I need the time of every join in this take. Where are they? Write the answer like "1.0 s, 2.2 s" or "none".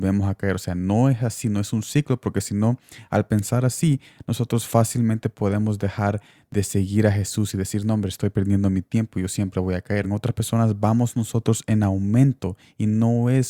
10.0 s